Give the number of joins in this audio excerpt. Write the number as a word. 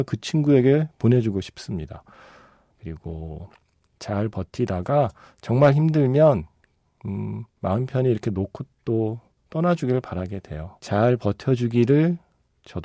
two